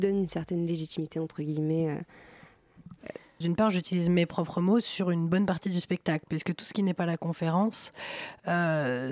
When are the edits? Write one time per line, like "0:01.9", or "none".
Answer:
0:03.4